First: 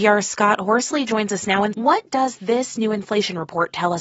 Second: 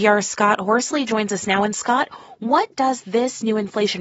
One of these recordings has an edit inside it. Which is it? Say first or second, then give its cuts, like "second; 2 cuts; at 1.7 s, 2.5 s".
first; 1 cut; at 1.7 s